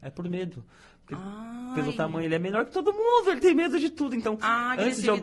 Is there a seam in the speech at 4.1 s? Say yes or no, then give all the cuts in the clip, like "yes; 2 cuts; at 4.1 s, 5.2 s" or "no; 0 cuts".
no; 0 cuts